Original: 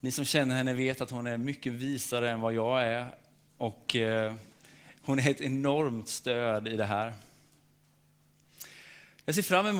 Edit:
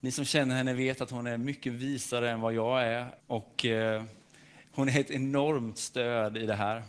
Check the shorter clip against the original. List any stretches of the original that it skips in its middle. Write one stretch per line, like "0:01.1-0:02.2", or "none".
0:03.2-0:03.5